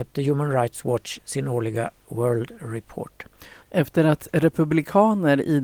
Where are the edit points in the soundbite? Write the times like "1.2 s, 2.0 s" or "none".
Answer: 3.6 s